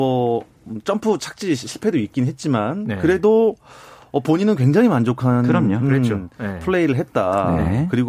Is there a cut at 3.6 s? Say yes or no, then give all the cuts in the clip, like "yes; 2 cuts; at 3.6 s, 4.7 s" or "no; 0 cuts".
no; 0 cuts